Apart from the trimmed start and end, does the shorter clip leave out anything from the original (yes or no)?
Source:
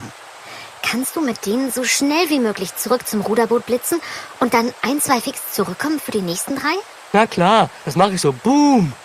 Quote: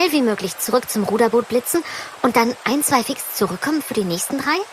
no